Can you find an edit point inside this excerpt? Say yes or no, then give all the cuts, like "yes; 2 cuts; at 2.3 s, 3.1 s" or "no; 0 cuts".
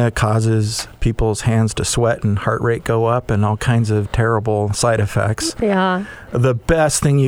no; 0 cuts